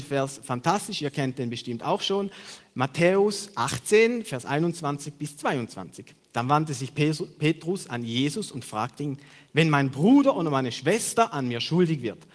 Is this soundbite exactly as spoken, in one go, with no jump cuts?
no; 1 cut; at 9.5 s

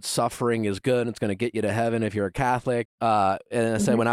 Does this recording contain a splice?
yes; 1 cut; at 2.9 s

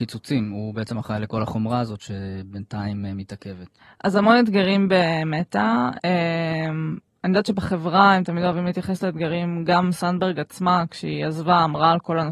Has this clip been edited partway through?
no; 0 cuts

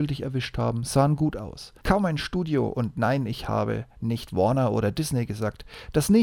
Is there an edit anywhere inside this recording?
yes; 1 cut; at 1.8 s

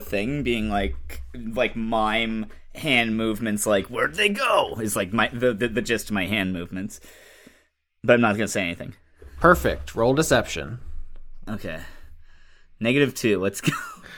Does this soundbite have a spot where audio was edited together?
no; 0 cuts

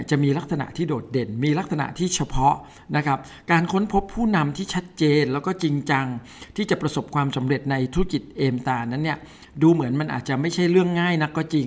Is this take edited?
no; 0 cuts

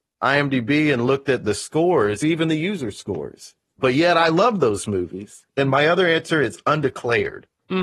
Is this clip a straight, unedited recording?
no; 2 cuts; at 2.2 s, 5.5 s

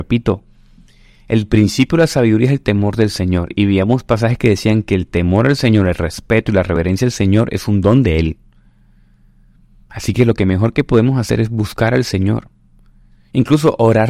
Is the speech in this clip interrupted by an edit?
no; 0 cuts

